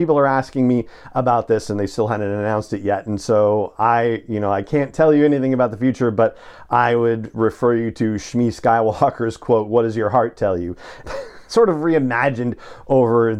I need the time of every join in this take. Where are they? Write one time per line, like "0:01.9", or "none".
0:11.0